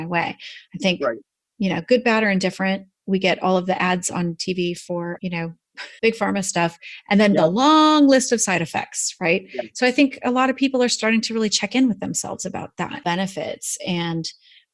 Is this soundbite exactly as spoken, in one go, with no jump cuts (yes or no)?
no